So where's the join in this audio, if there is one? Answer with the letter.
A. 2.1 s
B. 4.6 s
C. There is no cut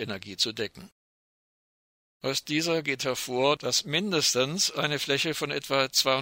A